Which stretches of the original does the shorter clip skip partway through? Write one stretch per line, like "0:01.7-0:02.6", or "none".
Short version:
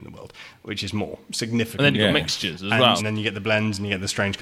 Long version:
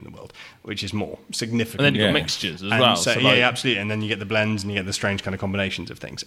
0:03.0-0:03.8